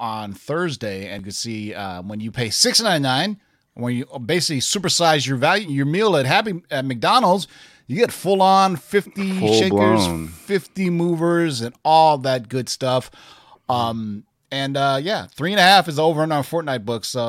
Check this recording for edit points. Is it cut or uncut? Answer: uncut